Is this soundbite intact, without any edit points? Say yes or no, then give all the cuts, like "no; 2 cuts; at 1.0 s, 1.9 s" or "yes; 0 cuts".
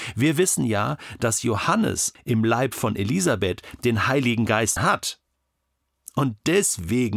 no; 2 cuts; at 2.2 s, 4.8 s